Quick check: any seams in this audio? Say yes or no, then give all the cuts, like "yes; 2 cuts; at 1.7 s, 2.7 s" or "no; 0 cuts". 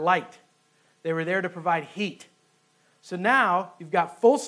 no; 0 cuts